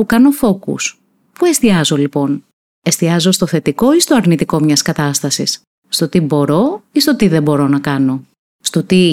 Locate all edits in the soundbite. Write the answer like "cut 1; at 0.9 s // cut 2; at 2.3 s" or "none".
none